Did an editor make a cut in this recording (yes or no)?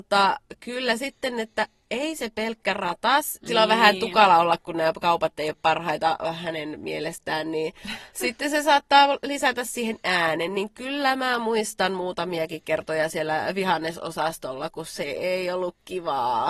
yes